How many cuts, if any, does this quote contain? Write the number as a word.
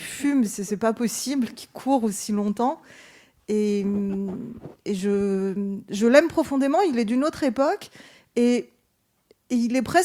zero